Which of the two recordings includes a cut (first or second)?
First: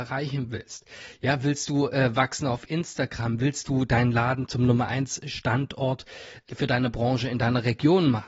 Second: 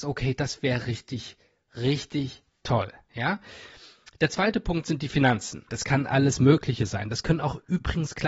second